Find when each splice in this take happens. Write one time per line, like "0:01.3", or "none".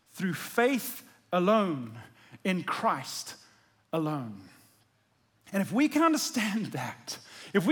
none